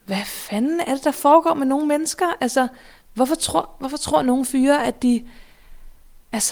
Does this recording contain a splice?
no; 0 cuts

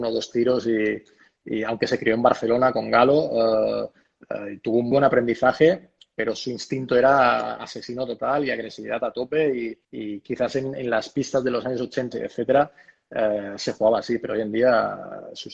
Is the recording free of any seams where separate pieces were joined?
no; 3 cuts; at 4.9 s, 9.8 s, 12.1 s

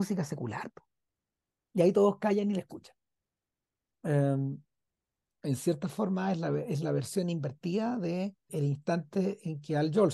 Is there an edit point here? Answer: yes; 3 cuts; at 1.6 s, 3.9 s, 8.5 s

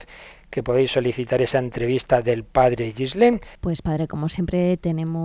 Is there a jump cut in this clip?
yes; 1 cut; at 3.6 s

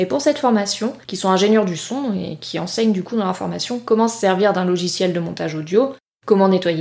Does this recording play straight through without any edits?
no; 1 cut; at 1.0 s

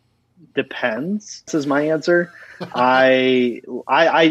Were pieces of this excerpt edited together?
yes; 1 cut; at 1.5 s

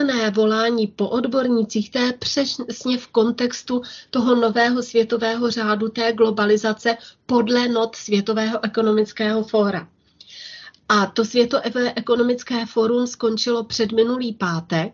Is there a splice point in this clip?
no; 0 cuts

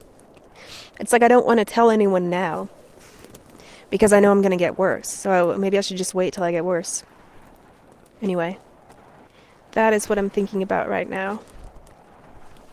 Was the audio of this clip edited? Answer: no; 0 cuts

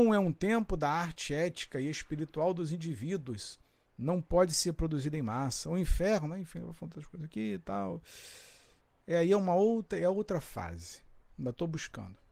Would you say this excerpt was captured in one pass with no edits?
no; 2 cuts; at 9.0 s, 11.3 s

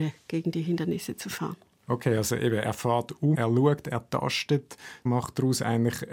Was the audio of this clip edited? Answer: yes; 2 cuts; at 3.3 s, 5.1 s

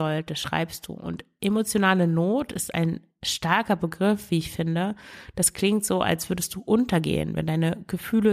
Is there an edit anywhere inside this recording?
no; 0 cuts

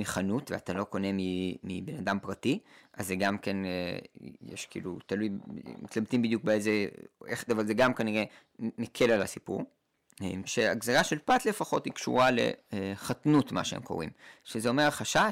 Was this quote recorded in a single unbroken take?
no; 2 cuts; at 7.5 s, 10.4 s

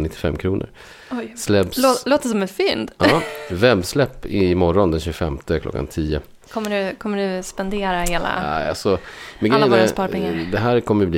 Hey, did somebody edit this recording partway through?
no; 0 cuts

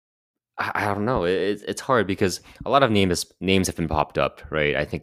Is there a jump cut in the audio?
no; 0 cuts

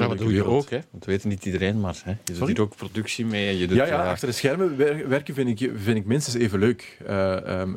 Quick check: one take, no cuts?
yes; 0 cuts

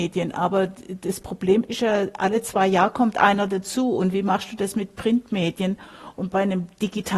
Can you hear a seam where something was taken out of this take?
no; 0 cuts

